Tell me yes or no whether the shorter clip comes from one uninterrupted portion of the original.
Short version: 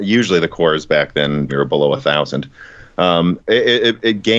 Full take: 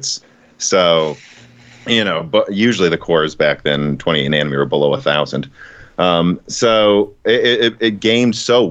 no